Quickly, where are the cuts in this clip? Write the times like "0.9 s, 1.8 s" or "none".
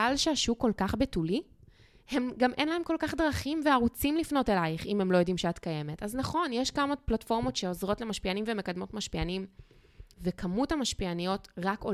10.1 s